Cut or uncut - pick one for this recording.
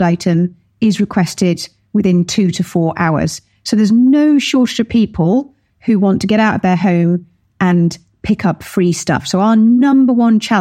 uncut